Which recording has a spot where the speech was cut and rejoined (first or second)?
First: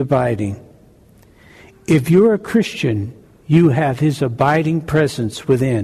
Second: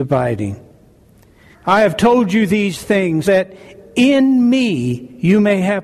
second